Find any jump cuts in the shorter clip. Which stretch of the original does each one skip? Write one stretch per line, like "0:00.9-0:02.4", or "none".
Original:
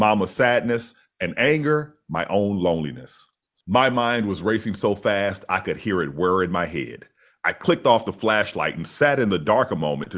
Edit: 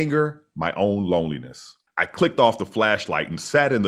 0:03.4-0:07.3